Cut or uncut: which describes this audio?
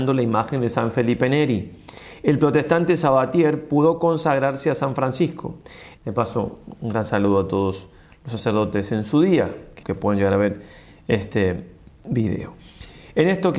cut